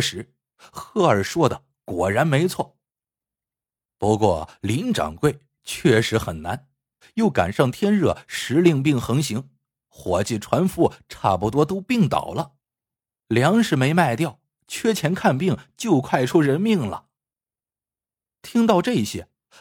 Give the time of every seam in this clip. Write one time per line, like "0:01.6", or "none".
0:07.0